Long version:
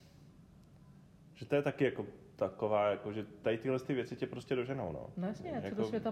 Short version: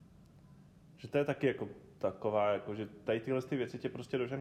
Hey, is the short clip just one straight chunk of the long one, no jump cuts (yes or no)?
yes